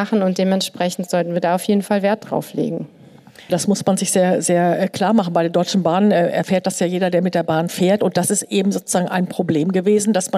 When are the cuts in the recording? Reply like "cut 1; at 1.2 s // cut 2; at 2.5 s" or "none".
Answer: cut 1; at 3.5 s